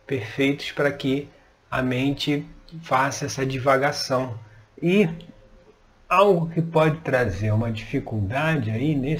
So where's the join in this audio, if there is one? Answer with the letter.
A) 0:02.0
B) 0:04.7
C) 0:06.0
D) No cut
B